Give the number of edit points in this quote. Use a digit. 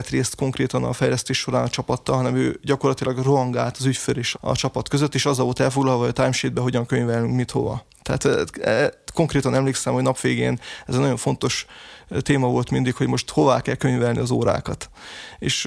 1